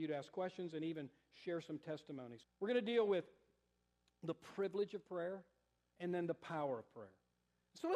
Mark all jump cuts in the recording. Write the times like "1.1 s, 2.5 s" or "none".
2.4 s, 5.8 s